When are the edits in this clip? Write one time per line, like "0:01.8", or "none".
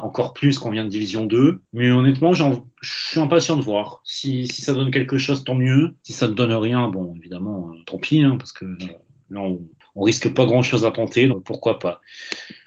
0:07.8
0:11.3